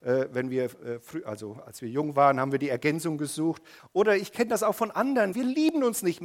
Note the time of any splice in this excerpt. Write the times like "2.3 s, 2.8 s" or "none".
3.8 s, 5.3 s